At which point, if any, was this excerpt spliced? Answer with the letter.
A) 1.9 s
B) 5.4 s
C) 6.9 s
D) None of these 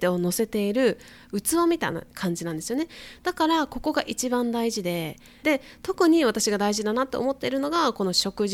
B